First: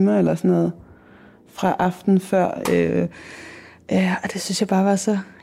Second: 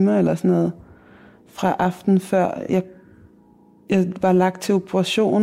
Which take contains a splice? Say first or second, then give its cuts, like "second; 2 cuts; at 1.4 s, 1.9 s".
first; 1 cut; at 2.6 s